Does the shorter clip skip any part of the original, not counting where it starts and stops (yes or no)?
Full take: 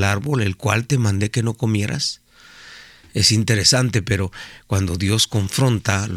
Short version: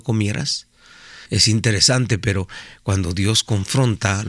yes